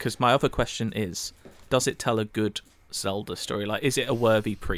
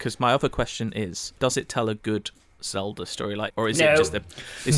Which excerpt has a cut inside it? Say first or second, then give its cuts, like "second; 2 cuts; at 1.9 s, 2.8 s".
second; 2 cuts; at 1.4 s, 3.5 s